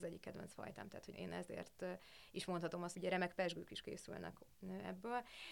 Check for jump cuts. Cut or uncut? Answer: cut